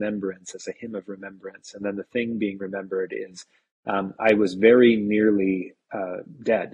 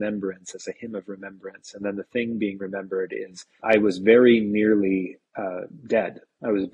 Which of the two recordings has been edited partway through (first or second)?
second